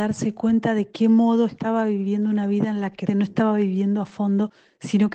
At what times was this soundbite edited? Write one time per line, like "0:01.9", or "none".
0:03.1